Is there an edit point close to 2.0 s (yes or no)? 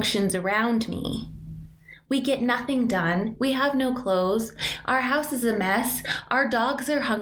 no